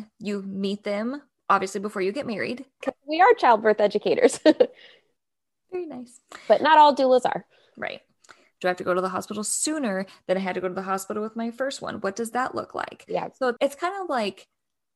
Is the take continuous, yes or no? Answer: no